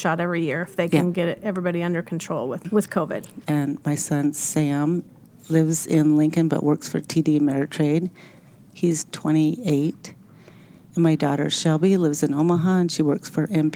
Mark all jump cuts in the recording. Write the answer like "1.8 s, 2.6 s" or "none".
3.4 s